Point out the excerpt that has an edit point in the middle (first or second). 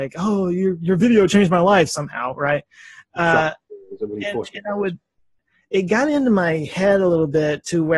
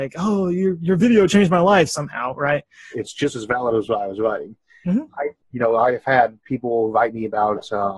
second